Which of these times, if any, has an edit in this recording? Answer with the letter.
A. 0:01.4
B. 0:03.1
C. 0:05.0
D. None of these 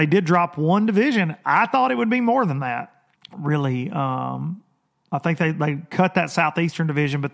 B